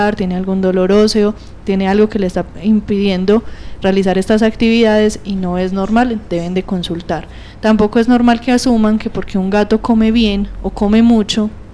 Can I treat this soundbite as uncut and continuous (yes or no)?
yes